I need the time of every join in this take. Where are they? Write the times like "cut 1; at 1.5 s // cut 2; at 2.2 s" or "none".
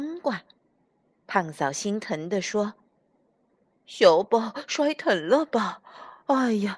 cut 1; at 4.2 s